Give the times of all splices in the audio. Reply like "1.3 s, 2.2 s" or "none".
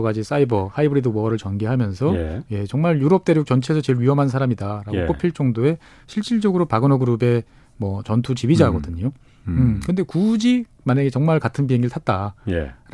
none

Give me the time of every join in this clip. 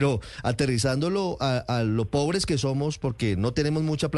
none

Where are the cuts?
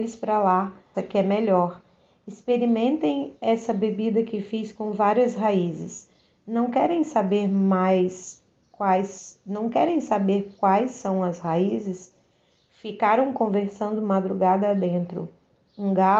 0.9 s

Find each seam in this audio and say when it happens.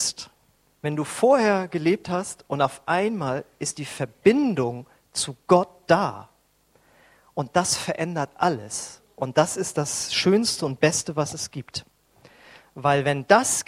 none

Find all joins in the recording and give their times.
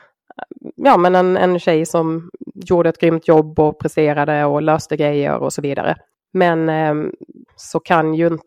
6.1 s, 7.5 s

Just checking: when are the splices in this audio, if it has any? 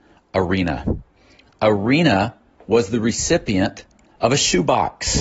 none

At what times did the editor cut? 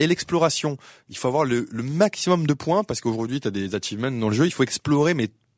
none

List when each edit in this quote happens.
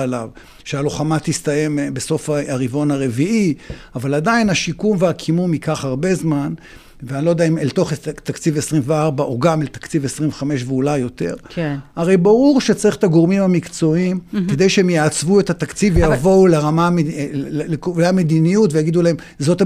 none

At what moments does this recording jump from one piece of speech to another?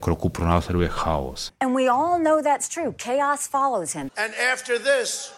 1.5 s, 4.1 s

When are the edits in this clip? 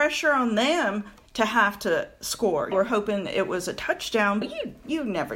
2.7 s, 4.4 s

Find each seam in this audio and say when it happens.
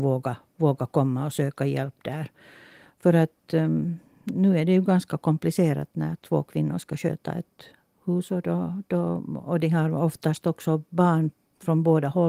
none

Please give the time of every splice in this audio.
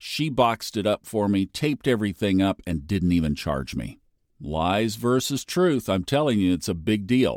none

